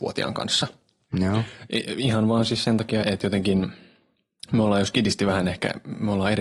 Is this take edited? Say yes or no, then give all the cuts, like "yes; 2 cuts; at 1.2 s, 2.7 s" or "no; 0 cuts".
yes; 1 cut; at 3.0 s